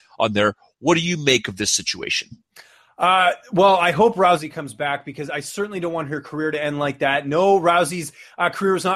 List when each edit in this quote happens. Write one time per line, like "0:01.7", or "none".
none